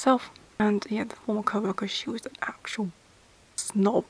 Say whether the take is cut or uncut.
cut